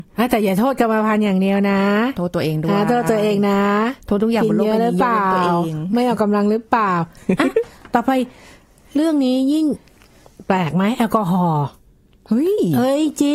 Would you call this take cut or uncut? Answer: uncut